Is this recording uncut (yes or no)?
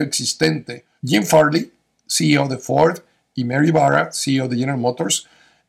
no